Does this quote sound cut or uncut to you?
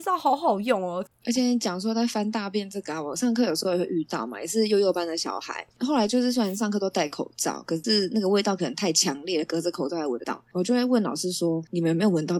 uncut